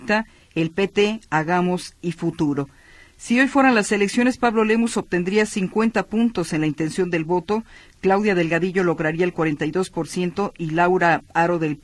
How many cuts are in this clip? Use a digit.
0